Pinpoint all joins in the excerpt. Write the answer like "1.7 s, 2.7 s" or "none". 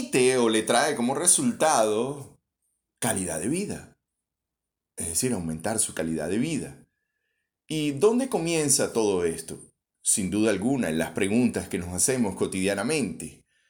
none